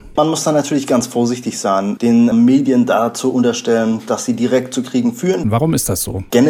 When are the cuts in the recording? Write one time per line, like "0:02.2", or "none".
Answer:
0:05.4